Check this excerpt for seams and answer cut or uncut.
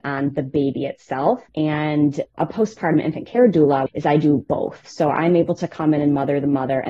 cut